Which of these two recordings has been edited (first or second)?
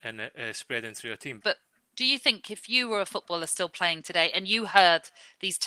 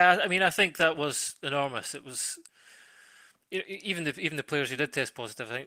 first